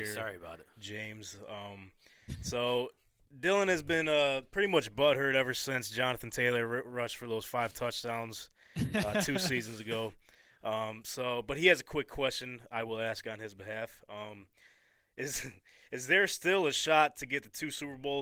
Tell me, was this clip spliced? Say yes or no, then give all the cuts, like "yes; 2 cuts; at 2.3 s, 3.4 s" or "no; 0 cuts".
no; 0 cuts